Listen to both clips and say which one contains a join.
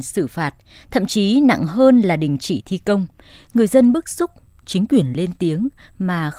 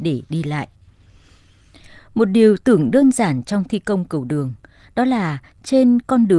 first; 1 cut; at 3.3 s

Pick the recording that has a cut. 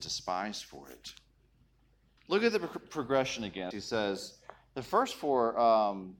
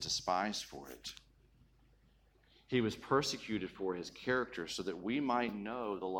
first; 2 cuts; at 2.2 s, 3.7 s

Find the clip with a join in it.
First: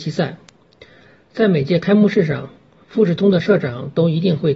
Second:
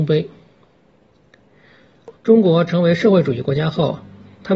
second; 1 cut; at 2.1 s

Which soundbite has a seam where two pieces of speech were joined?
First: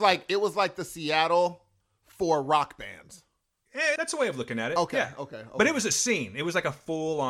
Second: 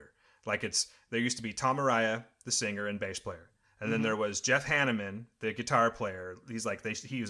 first; 1 cut; at 4.0 s

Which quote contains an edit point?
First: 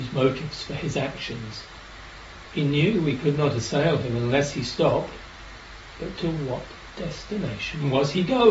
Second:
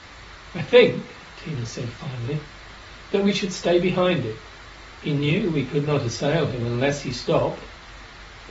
second; 1 cut; at 5.0 s

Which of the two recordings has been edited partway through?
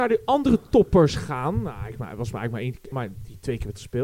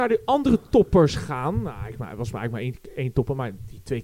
first; 1 cut; at 2.9 s

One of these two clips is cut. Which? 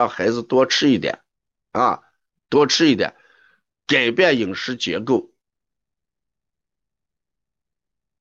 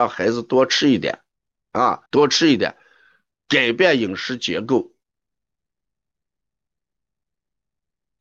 second; 1 cut; at 2.1 s

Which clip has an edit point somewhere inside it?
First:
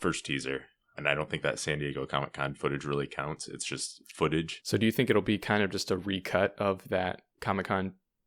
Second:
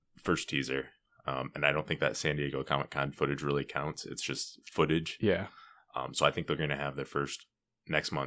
first; 2 cuts; at 1.0 s, 4.6 s

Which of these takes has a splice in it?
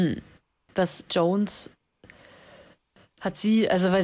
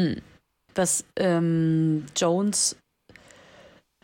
first; 1 cut; at 1.1 s

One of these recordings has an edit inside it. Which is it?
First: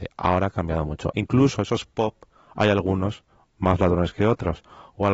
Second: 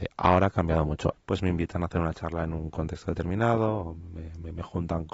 second; 1 cut; at 1.1 s

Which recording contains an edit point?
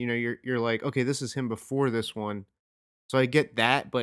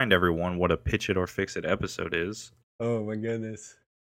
second; 1 cut; at 2.6 s

